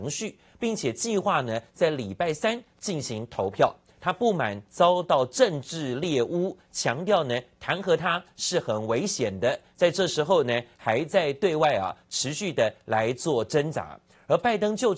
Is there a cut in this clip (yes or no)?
yes